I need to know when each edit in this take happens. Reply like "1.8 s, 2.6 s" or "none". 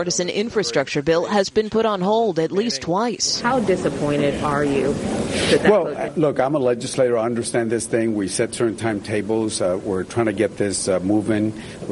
none